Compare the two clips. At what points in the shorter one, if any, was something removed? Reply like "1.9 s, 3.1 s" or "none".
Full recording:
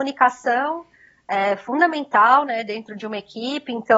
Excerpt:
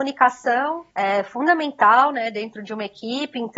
0.9 s